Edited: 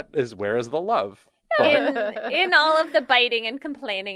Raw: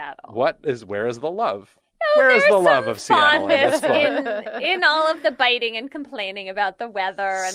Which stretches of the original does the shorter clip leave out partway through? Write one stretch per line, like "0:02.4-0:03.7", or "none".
0:02.1-0:03.9